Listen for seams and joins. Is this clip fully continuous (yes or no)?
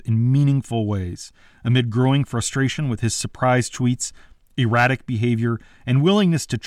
yes